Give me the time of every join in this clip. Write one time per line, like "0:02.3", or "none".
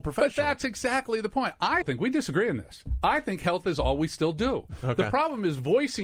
0:01.8